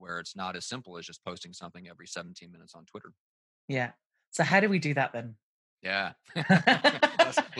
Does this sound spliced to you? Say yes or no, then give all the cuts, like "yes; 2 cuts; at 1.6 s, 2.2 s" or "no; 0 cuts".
no; 0 cuts